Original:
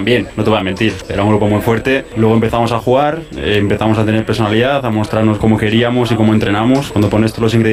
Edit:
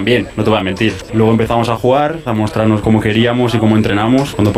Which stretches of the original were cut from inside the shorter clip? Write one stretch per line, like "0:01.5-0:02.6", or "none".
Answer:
0:01.1-0:02.1
0:03.3-0:04.8